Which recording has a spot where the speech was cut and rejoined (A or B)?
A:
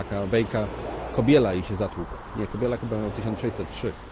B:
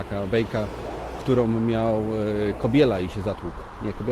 A